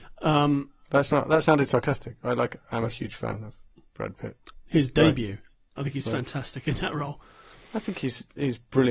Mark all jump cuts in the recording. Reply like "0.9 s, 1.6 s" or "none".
4.5 s

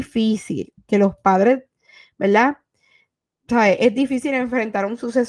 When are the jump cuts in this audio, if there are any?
none

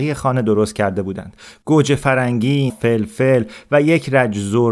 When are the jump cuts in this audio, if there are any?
2.7 s

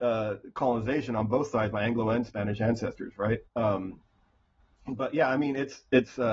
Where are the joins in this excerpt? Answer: 3.4 s

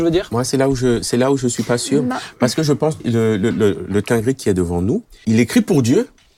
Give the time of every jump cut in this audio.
3.0 s, 5.2 s

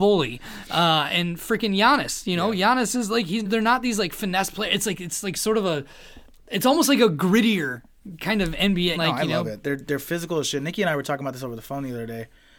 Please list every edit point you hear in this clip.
3.5 s, 9.0 s

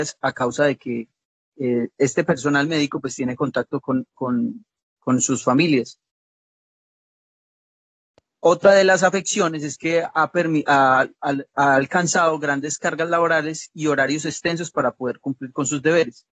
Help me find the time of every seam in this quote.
none

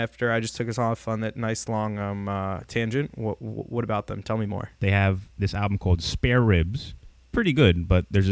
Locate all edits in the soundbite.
none

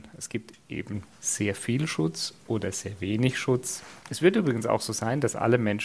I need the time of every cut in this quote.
none

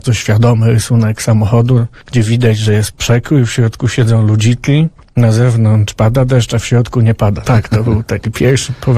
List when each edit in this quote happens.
7.4 s

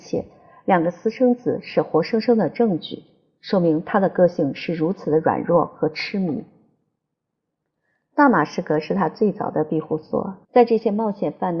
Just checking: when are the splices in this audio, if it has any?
10.4 s

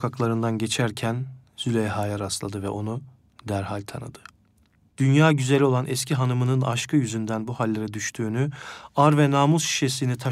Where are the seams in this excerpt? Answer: none

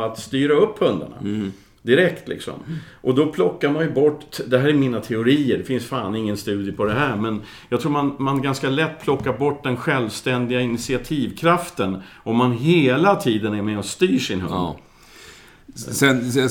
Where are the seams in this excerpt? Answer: none

